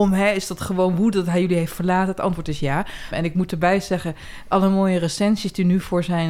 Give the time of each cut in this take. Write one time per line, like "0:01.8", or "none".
0:03.1